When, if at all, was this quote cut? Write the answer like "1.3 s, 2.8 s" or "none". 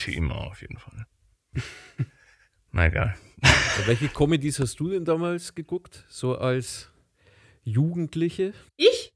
none